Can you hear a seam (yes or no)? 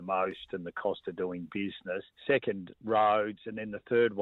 no